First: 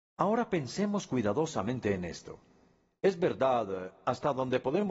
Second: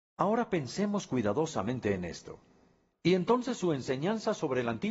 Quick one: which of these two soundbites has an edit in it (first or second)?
second